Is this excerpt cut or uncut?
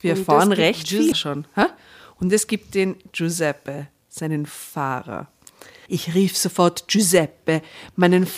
cut